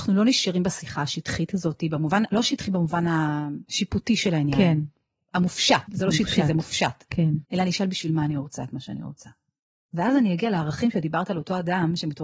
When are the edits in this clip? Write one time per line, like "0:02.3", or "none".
0:05.9
0:07.4